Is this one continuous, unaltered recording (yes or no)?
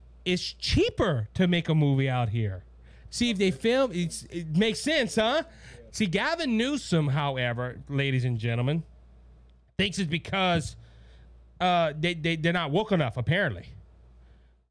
no